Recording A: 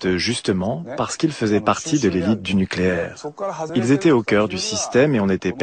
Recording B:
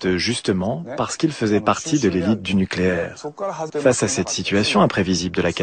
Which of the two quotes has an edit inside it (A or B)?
B